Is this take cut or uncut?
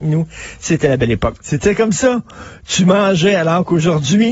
cut